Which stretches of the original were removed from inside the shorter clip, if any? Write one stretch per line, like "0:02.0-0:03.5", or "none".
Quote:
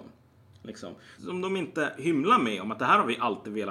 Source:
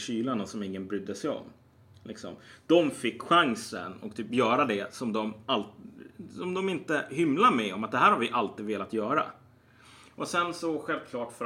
0:02.6-0:06.3